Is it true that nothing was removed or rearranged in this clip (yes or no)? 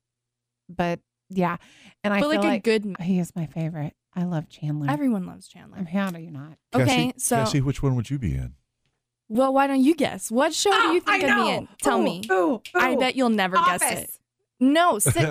no